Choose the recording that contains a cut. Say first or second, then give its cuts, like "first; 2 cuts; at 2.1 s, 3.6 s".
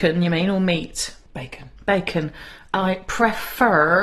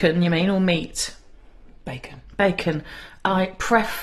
first; 1 cut; at 1.3 s